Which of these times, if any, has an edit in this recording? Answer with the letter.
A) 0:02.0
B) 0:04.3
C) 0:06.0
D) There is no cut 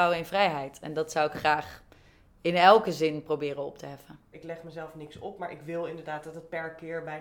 B